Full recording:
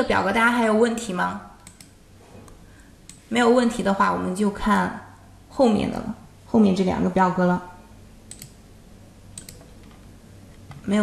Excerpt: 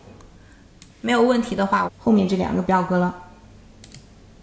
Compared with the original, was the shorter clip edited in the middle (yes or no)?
yes